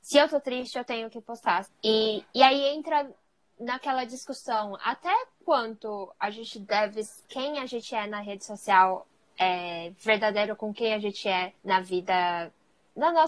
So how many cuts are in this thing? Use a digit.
2